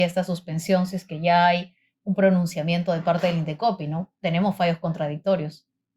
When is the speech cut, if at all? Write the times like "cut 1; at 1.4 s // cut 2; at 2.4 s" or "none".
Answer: none